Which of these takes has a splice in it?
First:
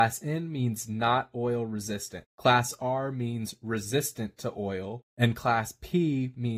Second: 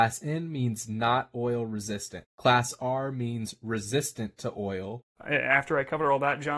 second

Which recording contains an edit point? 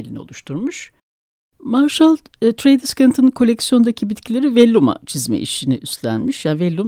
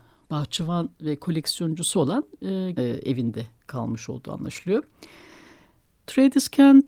second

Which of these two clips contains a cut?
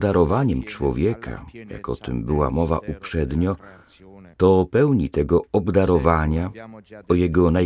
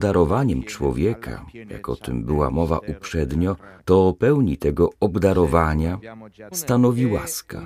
second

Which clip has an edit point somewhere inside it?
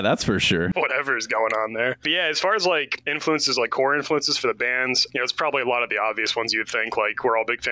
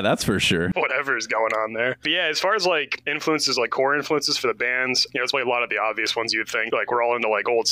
second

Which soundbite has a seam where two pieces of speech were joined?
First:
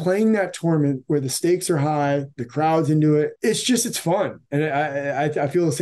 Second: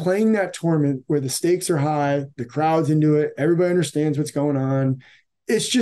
first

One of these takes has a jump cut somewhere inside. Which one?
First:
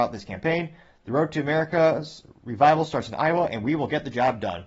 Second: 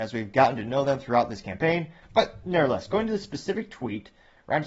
second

